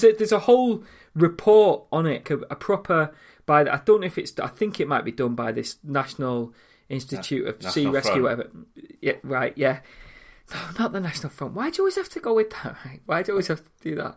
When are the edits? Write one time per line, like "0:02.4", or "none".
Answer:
0:02.2